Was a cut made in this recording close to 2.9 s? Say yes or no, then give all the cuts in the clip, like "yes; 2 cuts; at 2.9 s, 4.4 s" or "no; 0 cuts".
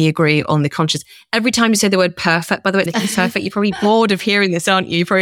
yes; 1 cut; at 2.9 s